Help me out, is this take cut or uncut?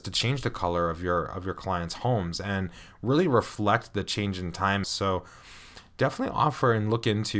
cut